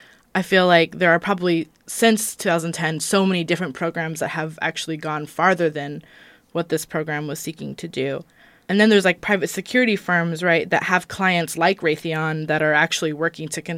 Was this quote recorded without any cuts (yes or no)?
yes